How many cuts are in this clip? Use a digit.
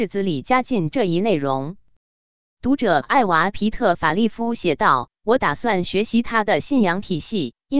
1